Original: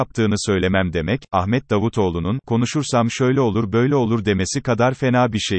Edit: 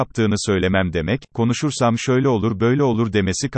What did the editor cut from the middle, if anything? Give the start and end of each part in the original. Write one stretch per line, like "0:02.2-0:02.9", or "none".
0:01.3-0:02.4